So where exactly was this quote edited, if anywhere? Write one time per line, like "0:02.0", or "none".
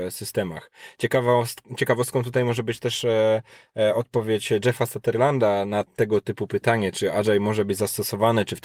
none